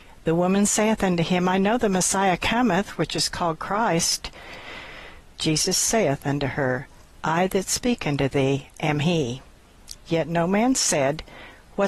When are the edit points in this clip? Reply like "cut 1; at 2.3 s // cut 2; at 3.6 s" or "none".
cut 1; at 5.2 s // cut 2; at 10.0 s

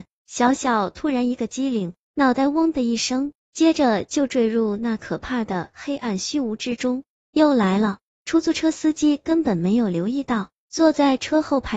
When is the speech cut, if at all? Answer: cut 1; at 7.1 s

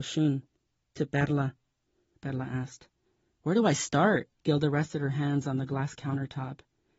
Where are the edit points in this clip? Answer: cut 1; at 2.1 s // cut 2; at 4.4 s

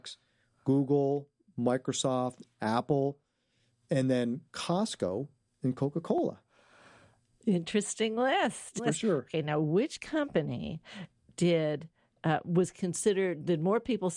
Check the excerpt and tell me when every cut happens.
cut 1; at 8.8 s

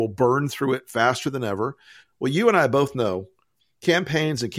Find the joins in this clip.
cut 1; at 2.0 s

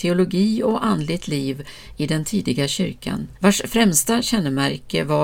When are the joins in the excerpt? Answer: cut 1; at 3.4 s

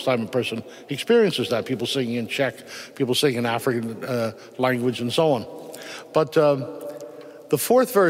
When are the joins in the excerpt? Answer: none

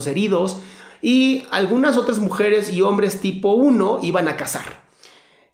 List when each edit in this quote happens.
none

